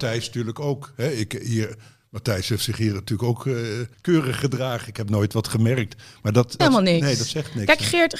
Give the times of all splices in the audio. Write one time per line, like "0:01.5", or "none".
0:03.9
0:06.6